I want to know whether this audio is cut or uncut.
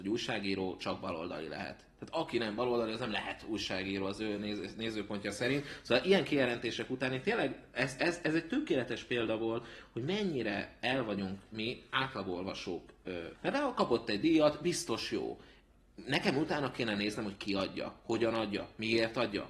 cut